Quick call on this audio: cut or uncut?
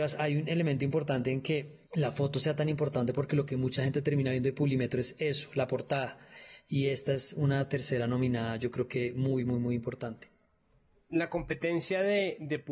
uncut